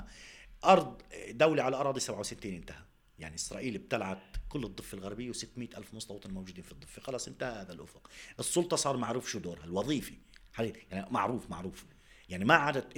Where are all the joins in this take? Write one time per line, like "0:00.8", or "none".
none